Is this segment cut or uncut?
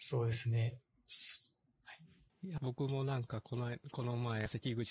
cut